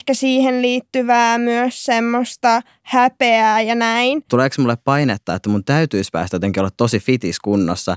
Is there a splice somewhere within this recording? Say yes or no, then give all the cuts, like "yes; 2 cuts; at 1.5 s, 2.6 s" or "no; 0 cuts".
yes; 1 cut; at 4.3 s